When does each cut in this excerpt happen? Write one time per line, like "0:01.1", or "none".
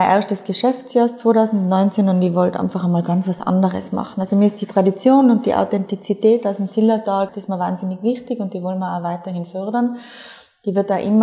0:07.3